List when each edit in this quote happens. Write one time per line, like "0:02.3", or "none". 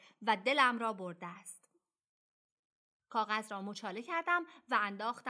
none